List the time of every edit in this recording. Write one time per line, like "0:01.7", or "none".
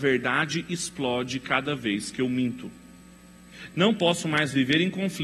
none